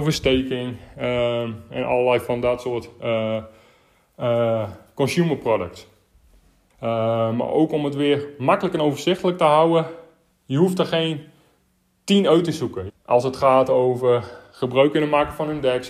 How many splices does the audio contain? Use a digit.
2